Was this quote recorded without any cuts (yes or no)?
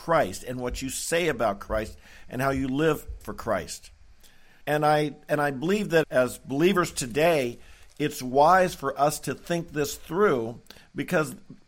no